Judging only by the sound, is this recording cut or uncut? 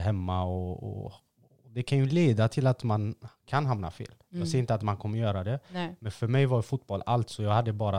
uncut